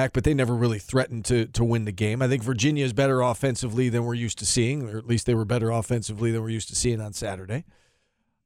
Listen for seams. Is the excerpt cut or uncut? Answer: uncut